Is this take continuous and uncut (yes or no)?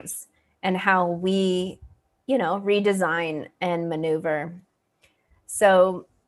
yes